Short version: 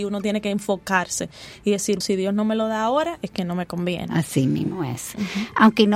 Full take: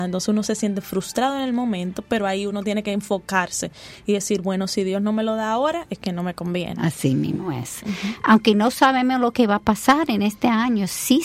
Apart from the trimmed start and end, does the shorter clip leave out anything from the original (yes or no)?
yes